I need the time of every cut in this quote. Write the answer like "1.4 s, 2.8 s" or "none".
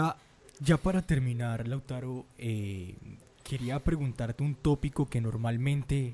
none